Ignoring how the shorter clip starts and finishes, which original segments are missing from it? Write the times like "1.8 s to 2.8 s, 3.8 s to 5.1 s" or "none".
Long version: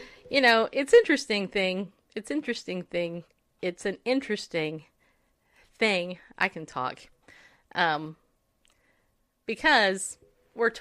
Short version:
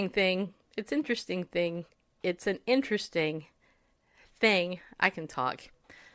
none